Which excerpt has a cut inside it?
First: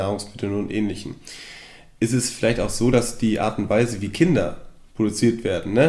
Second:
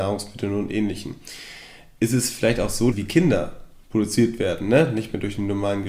second; 1 cut; at 2.9 s

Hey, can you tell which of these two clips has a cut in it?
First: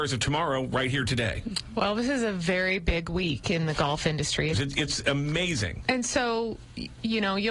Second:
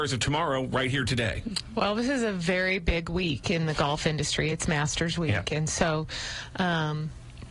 first; 2 cuts; at 4.5 s, 5.8 s

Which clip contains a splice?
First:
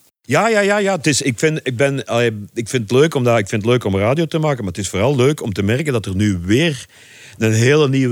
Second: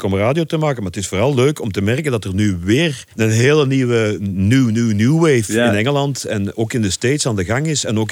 second; 1 cut; at 3.1 s

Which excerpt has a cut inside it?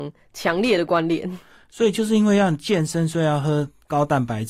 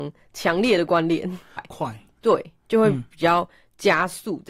second; 1 cut; at 1.6 s

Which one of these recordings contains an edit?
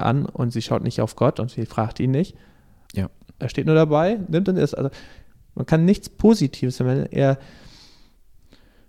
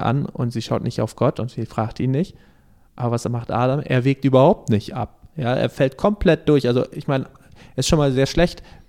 first; 1 cut; at 2.9 s

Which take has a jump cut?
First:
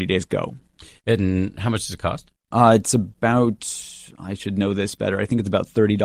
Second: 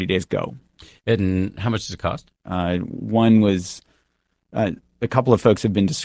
second; 1 cut; at 2.4 s

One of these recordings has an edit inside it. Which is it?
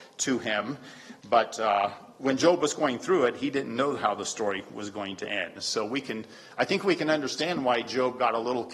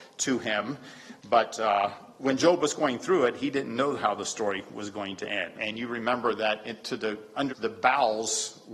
second; 2 cuts; at 5.5 s, 7.5 s

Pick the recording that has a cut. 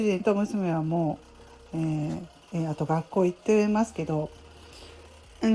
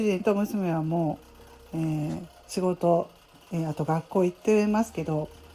first; 1 cut; at 2.3 s

